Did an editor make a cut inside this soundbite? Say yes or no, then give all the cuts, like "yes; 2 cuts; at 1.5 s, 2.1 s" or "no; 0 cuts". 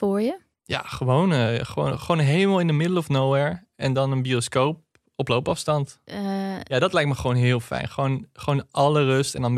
no; 0 cuts